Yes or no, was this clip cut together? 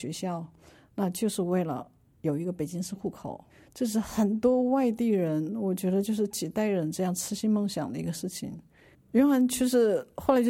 yes